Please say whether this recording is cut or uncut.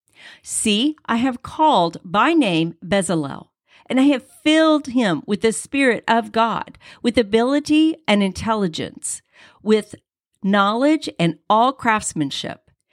uncut